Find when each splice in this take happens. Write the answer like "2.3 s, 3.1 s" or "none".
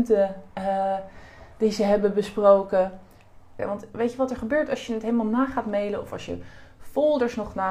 3.6 s